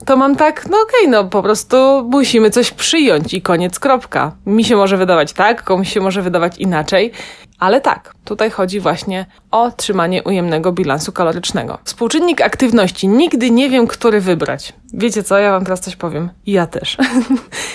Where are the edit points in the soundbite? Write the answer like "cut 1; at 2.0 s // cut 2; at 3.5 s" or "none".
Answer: cut 1; at 7.5 s // cut 2; at 11.9 s